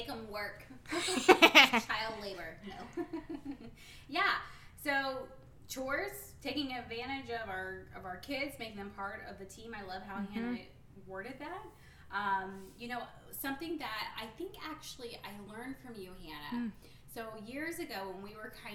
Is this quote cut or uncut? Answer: uncut